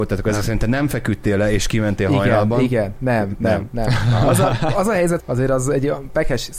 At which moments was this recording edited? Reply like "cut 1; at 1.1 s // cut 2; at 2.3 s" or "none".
cut 1; at 5.2 s

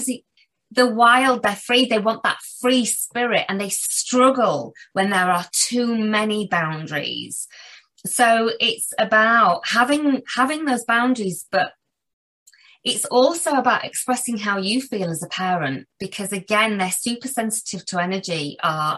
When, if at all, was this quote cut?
none

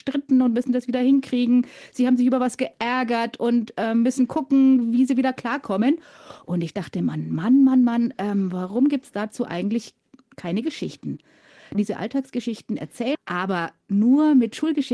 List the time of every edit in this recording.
cut 1; at 11.7 s // cut 2; at 13.1 s

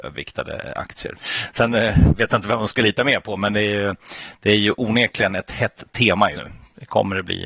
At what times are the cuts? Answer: cut 1; at 1.2 s // cut 2; at 6.3 s

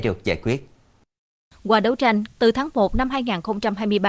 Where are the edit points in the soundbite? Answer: cut 1; at 2.3 s

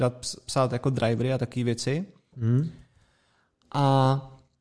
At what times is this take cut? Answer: cut 1; at 2.3 s

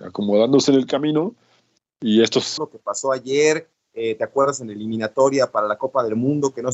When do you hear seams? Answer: cut 1; at 2.6 s

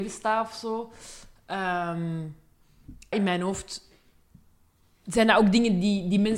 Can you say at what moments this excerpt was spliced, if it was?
cut 1; at 3.1 s

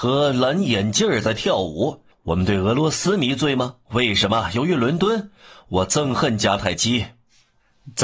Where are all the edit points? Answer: cut 1; at 2.1 s // cut 2; at 3.9 s

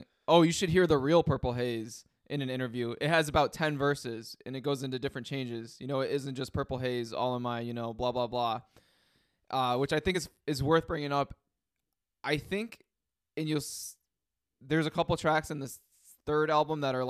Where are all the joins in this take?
none

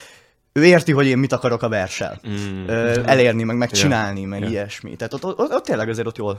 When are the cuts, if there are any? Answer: none

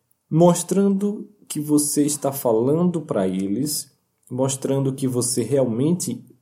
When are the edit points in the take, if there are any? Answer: none

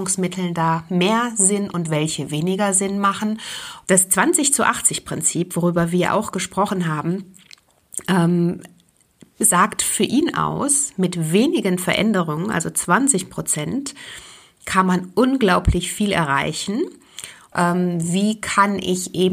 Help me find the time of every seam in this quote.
cut 1; at 3.9 s // cut 2; at 17.5 s

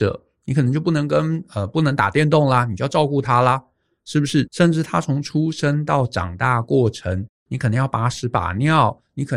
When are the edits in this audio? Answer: cut 1; at 4.5 s // cut 2; at 7.4 s

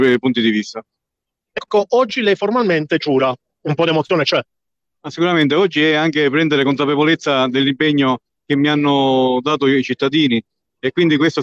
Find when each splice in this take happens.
none

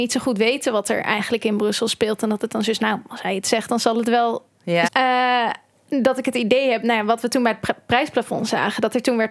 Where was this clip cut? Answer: cut 1; at 4.9 s

